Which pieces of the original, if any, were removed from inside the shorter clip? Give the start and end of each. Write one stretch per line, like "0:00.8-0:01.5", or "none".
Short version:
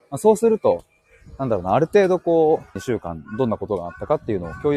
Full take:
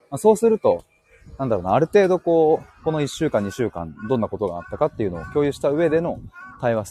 0:02.8-0:03.5